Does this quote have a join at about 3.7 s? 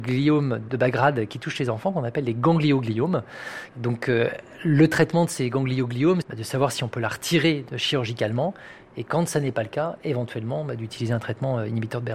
no; 1 cut; at 6.2 s

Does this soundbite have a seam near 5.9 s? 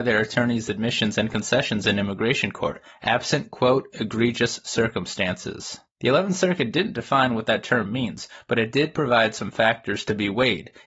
yes; 1 cut; at 5.9 s

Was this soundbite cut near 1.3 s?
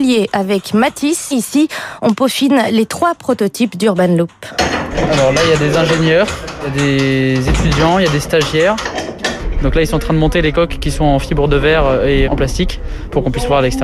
yes; 2 cuts; at 1.3 s, 12.2 s

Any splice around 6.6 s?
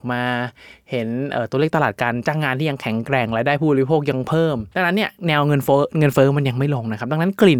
no; 1 cut; at 4.7 s

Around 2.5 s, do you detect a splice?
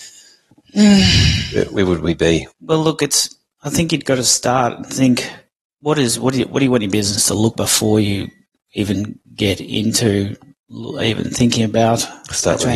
yes; 2 cuts; at 2.5 s, 7.5 s

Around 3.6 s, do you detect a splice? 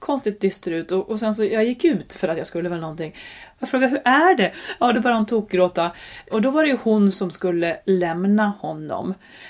yes; 2 cuts; at 3.6 s, 6.3 s

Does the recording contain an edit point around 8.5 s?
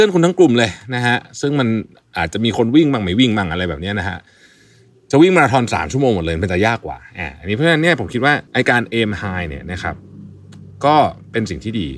yes; 1 cut; at 8.5 s

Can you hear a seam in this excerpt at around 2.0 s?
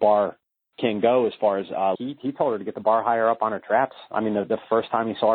yes; 1 cut; at 2.0 s

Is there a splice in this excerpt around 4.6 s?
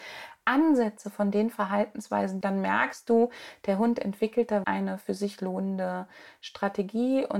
yes; 2 cuts; at 2.4 s, 4.6 s

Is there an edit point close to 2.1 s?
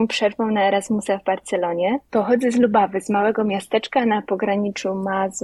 yes; 1 cut; at 2.1 s

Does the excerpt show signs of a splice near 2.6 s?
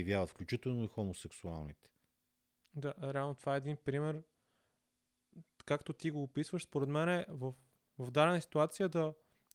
yes; 1 cut; at 2.6 s

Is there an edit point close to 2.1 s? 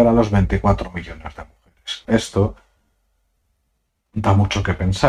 yes; 1 cut; at 2.1 s

